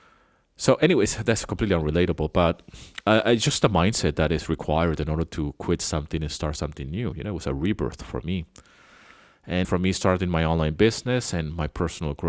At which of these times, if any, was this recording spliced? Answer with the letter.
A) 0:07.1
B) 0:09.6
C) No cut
B